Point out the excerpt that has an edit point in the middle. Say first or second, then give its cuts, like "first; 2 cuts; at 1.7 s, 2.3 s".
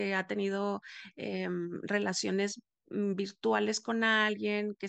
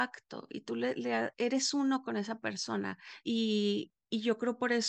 second; 1 cut; at 3.2 s